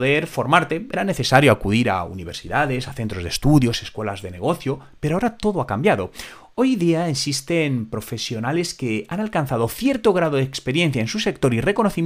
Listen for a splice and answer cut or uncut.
uncut